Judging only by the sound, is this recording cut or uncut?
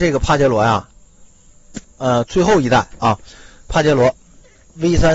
uncut